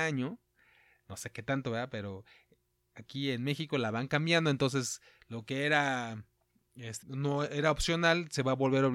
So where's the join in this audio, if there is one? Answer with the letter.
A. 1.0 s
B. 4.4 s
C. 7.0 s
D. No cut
C